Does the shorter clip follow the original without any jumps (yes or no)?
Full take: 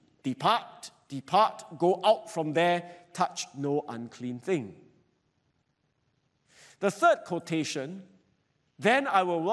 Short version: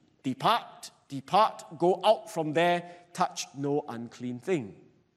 yes